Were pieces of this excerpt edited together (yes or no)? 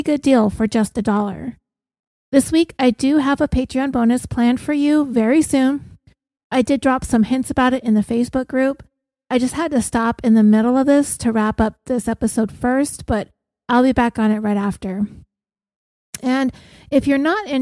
no